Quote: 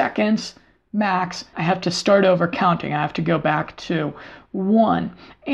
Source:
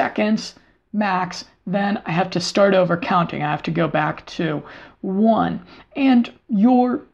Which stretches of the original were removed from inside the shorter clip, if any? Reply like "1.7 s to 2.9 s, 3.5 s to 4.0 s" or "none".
1.5 s to 2.0 s